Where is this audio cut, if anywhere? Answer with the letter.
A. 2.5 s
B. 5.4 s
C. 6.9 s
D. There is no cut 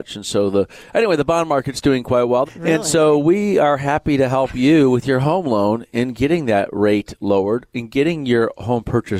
A